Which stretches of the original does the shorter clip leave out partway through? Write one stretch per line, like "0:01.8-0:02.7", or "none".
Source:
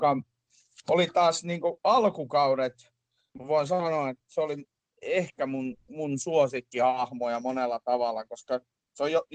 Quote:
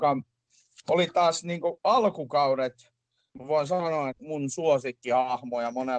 0:04.1-0:05.8